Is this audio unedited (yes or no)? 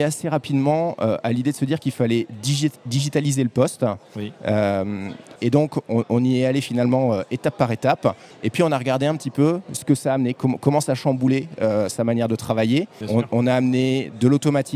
no